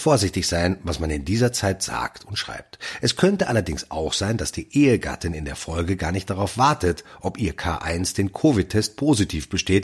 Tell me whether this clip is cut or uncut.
uncut